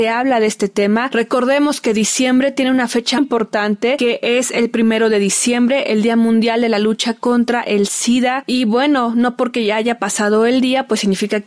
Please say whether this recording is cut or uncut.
cut